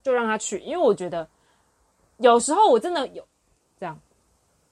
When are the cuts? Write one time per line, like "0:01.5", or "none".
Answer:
0:03.6

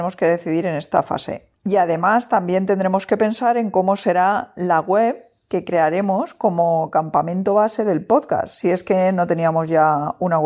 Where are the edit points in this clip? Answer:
0:01.6

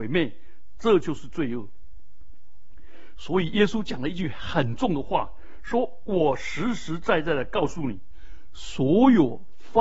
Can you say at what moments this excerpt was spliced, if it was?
none

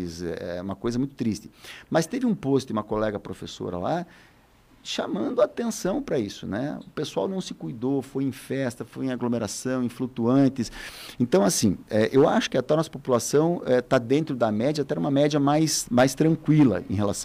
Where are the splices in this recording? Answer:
none

